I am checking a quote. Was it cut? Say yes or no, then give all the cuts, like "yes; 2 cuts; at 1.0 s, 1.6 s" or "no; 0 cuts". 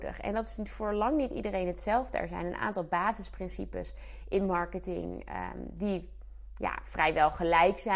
no; 0 cuts